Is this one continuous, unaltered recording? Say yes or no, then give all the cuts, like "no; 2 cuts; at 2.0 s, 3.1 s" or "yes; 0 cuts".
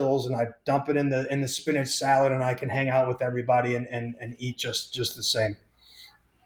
yes; 0 cuts